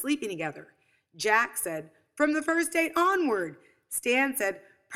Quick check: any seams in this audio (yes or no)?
no